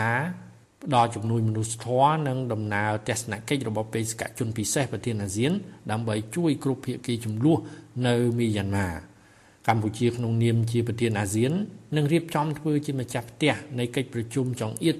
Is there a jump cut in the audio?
no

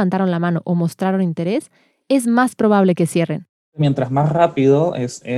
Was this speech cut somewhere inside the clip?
yes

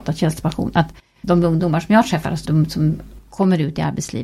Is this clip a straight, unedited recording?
no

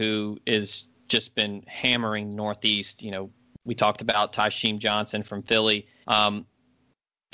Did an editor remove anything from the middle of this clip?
yes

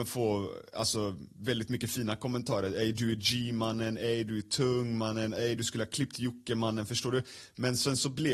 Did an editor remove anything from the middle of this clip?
no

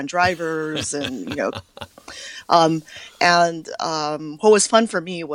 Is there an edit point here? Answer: no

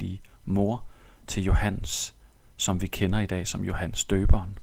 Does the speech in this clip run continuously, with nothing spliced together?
yes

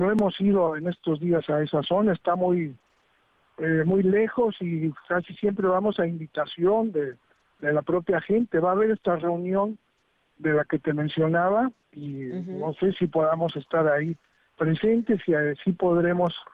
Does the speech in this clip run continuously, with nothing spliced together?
yes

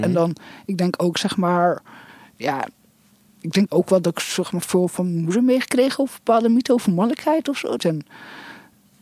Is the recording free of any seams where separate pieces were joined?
no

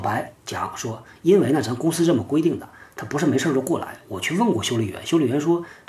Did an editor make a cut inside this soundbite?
no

